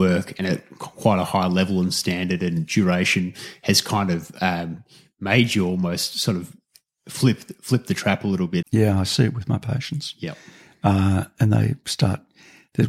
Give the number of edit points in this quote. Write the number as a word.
one